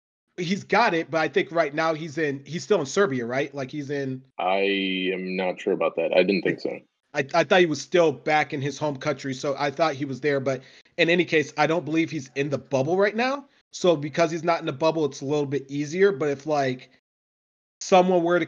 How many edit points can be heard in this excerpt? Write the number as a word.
one